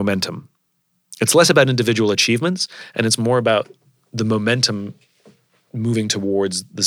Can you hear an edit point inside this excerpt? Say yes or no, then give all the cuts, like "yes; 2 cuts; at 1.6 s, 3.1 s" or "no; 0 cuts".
no; 0 cuts